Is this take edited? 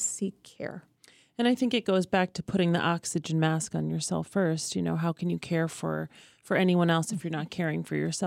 no; 0 cuts

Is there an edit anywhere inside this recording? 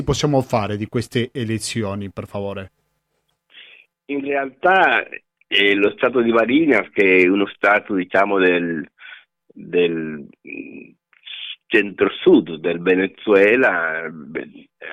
no; 0 cuts

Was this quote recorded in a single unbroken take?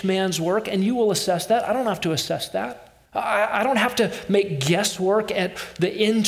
no; 1 cut; at 3.1 s

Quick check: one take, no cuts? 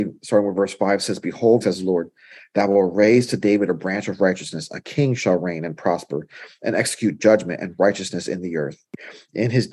no; 1 cut; at 1.6 s

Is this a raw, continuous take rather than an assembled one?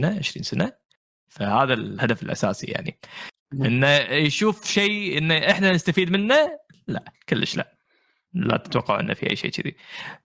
yes; 0 cuts

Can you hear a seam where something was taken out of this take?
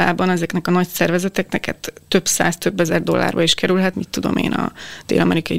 yes; 1 cut; at 3.9 s

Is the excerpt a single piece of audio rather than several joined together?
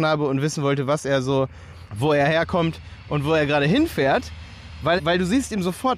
no; 2 cuts; at 1.9 s, 5.0 s

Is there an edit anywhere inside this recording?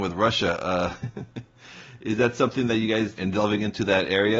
yes; 1 cut; at 3.2 s

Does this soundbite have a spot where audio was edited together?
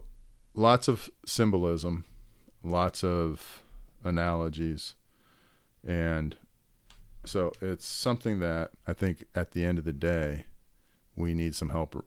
yes; 2 cuts; at 5.7 s, 8.8 s

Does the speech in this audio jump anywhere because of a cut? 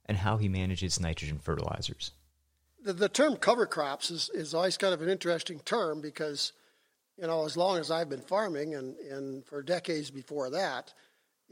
no; 0 cuts

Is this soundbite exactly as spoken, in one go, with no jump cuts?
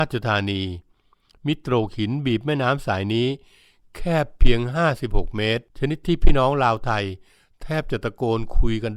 no; 1 cut; at 5.7 s

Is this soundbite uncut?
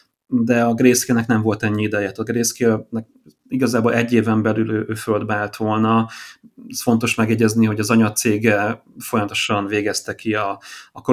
yes; 0 cuts

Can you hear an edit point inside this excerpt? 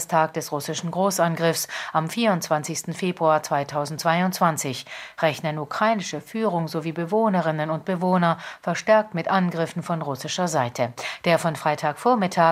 no; 0 cuts

